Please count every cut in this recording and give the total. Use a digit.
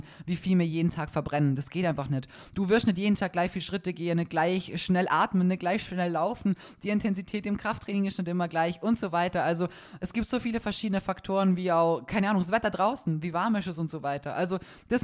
0